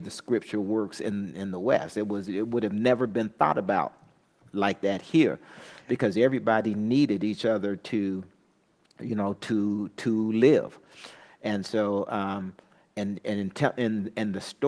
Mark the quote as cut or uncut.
uncut